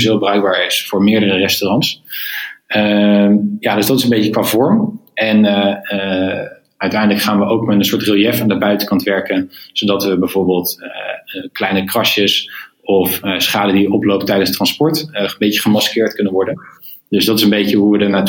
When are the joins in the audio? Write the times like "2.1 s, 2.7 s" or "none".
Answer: none